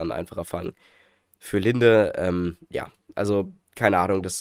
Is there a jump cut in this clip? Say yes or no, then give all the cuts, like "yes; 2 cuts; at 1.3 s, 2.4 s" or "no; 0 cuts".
no; 0 cuts